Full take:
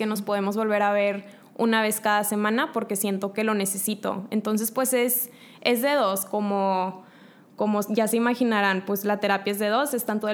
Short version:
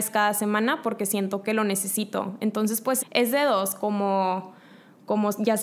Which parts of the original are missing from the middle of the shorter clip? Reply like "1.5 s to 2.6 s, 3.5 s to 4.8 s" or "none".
4.9 s to 5.5 s